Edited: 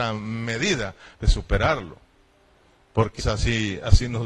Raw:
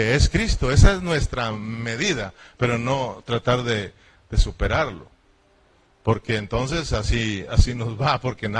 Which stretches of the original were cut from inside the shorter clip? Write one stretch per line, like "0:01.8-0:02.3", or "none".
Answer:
0:02.5-0:04.2
0:06.3-0:06.8